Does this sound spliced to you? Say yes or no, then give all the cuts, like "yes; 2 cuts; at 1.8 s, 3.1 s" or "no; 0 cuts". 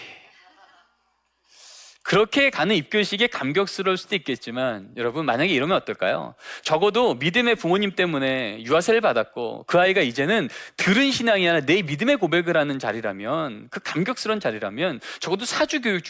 no; 0 cuts